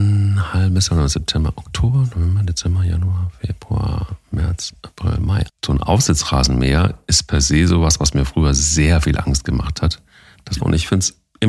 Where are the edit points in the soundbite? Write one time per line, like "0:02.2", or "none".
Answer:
0:05.5
0:10.6